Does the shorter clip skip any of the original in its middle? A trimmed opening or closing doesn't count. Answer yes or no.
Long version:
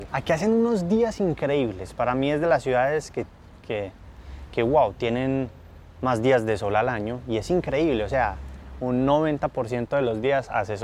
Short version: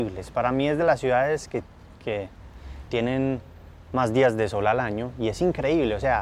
yes